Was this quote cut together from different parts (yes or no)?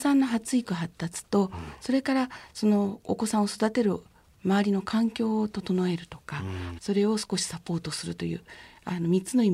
yes